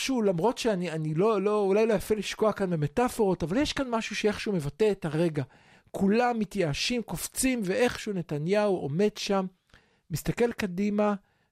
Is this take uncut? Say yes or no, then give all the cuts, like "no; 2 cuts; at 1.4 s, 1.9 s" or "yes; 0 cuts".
yes; 0 cuts